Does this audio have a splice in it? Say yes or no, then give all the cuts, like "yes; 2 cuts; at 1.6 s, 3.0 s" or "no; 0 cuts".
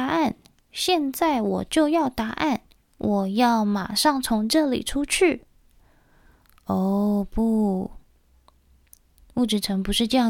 no; 0 cuts